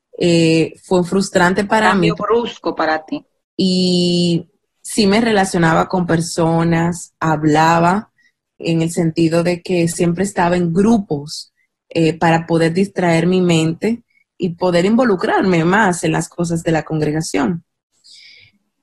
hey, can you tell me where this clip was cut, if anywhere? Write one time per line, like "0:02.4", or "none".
0:03.4
0:08.6
0:14.4